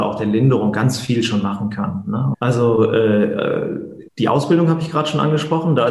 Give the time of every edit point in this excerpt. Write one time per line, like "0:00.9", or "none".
0:02.3
0:04.1

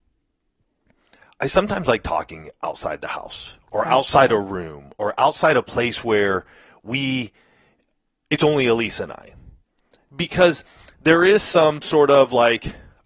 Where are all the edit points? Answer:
none

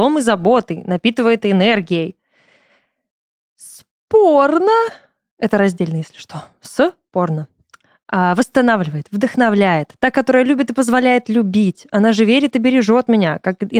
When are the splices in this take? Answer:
none

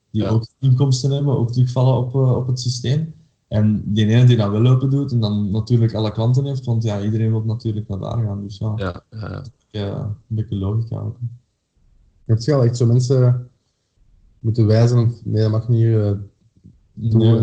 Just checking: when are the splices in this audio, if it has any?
none

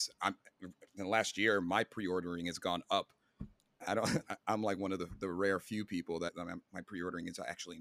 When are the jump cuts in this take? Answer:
0:06.3

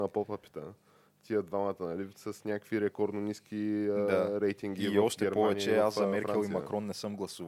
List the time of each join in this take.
none

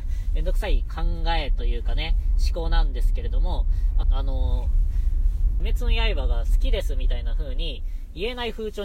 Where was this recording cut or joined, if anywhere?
0:04.0
0:05.6

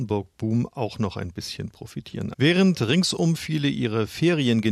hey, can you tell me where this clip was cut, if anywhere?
0:02.3

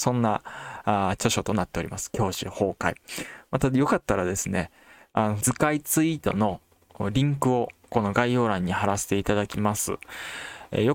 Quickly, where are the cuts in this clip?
0:05.4

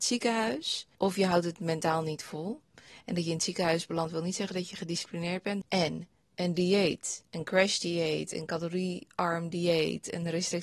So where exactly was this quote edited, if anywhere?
0:05.6

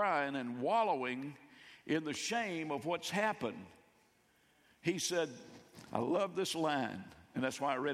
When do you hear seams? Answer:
none

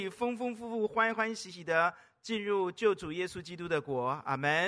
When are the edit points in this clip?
none

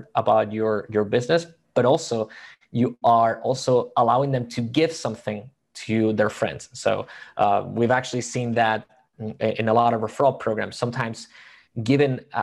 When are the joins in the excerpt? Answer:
none

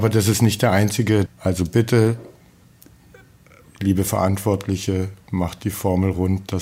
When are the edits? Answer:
0:01.3

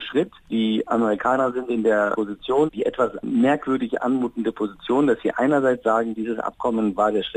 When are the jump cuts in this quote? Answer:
0:02.7

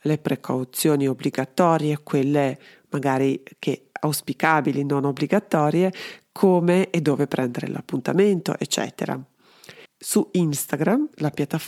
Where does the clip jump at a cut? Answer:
0:09.8

